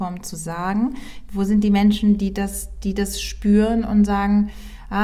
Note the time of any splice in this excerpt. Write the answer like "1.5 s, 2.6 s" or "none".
1.3 s

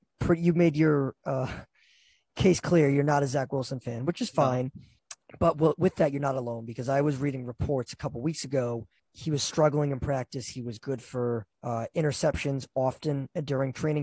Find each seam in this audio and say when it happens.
11.5 s

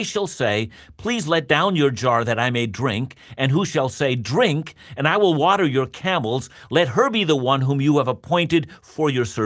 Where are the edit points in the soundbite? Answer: none

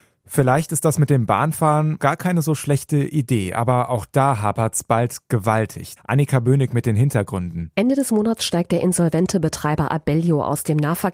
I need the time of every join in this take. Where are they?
2.0 s, 6.0 s

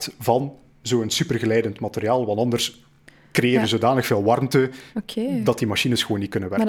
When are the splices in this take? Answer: none

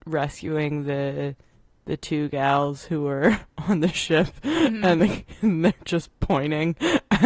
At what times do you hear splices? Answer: none

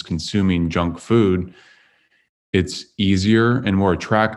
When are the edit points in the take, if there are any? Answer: none

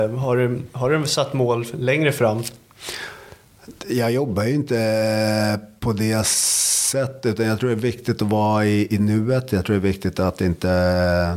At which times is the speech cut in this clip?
none

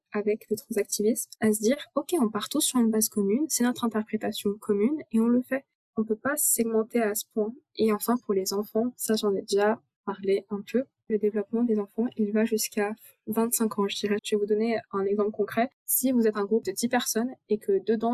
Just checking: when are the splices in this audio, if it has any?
11.1 s, 14.2 s

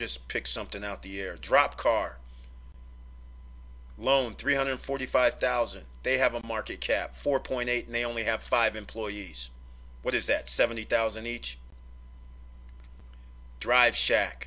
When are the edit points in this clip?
none

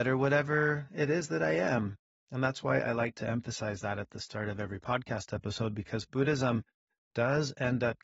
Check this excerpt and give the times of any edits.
none

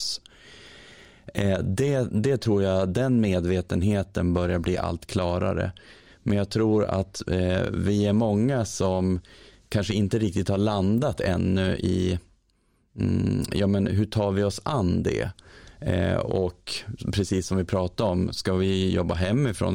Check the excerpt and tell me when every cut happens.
none

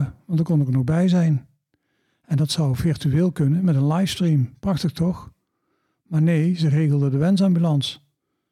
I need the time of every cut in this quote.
none

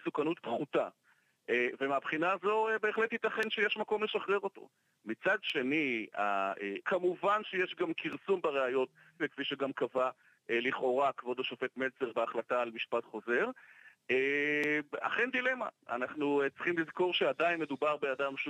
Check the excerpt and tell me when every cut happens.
6.8 s, 9.2 s

